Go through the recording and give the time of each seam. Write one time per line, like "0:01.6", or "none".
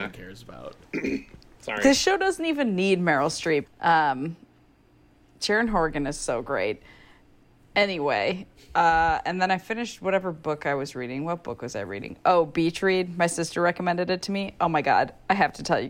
0:03.6